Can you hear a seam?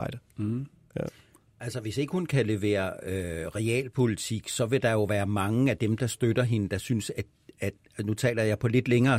no; 0 cuts

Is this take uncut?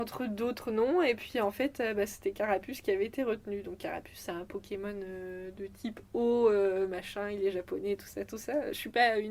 yes; 0 cuts

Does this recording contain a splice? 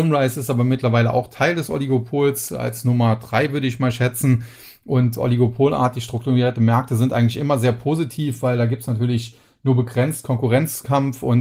no; 0 cuts

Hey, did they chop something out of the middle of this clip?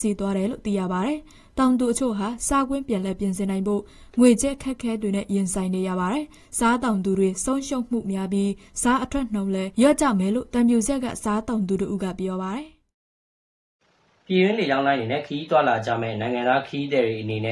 no; 0 cuts

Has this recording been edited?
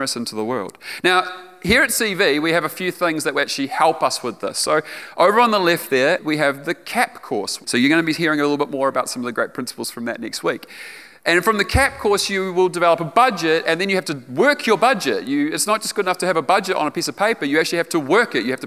yes; 2 cuts; at 6.2 s, 7.6 s

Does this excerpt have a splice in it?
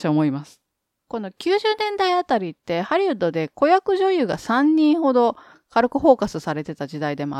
yes; 1 cut; at 1.0 s

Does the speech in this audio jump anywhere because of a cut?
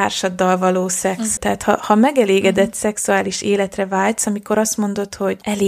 yes; 1 cut; at 1.4 s

